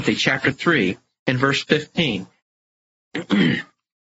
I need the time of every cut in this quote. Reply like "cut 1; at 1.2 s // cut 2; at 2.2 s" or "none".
cut 1; at 2.4 s